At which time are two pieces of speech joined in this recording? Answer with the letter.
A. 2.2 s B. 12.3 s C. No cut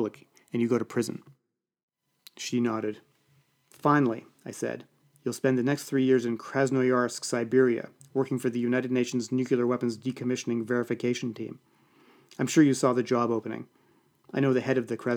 C